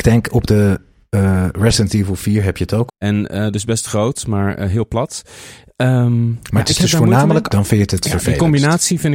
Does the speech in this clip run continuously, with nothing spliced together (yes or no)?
no